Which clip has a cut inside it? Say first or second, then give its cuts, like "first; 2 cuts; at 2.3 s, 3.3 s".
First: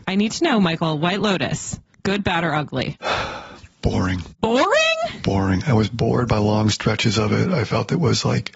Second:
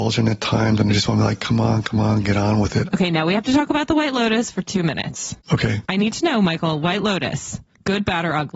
second; 1 cut; at 2.9 s